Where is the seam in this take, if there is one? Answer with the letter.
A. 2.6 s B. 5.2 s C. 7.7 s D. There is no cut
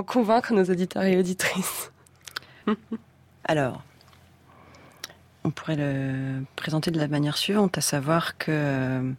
A